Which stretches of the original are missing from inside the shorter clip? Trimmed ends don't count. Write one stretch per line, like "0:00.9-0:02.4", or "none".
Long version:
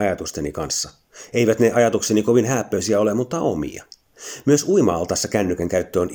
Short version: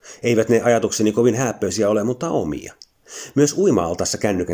none